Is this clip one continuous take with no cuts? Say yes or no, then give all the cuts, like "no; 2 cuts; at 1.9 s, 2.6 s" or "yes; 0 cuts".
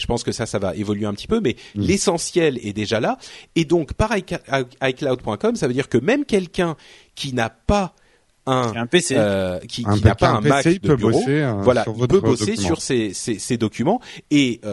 yes; 0 cuts